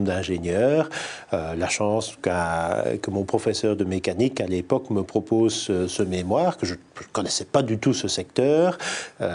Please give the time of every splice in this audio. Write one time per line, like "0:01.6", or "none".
none